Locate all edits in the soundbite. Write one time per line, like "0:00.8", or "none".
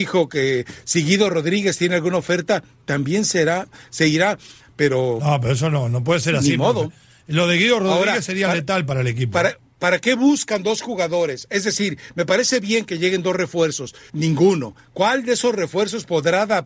0:04.6
0:14.1